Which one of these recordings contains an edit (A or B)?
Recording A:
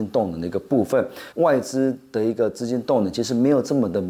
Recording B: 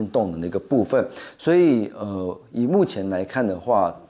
A